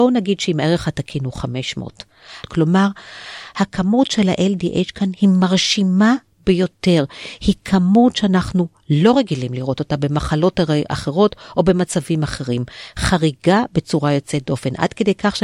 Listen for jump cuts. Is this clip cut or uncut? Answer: cut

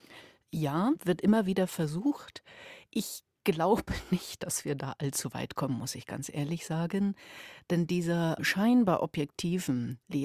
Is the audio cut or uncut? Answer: uncut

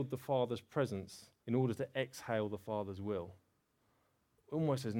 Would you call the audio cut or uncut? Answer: cut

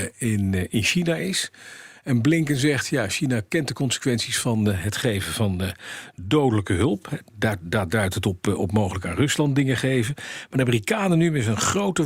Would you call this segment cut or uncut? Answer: uncut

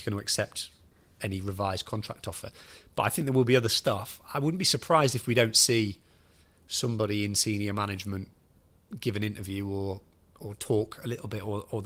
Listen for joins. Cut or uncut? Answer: uncut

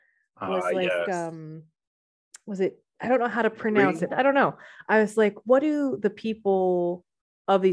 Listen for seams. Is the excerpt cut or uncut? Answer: cut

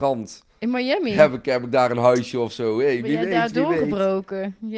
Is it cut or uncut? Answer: uncut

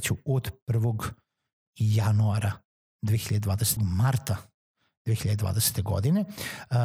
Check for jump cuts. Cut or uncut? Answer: cut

